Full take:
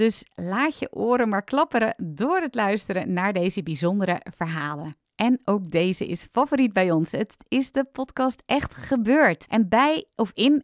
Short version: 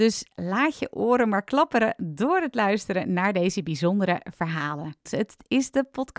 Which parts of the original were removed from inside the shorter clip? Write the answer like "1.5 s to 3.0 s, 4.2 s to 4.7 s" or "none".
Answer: 5.1 s to 7.1 s